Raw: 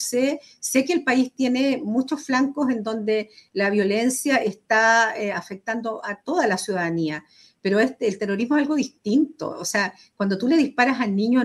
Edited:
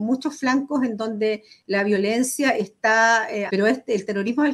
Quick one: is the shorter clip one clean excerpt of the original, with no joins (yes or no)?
no